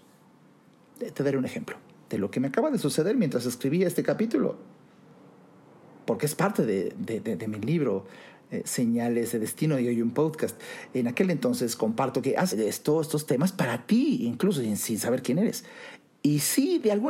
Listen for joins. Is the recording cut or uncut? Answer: cut